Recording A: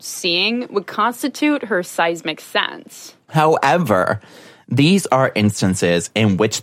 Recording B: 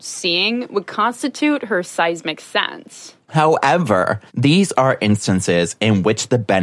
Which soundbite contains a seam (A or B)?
B